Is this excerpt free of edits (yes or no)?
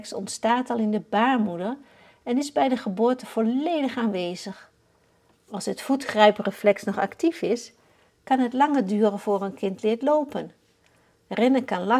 no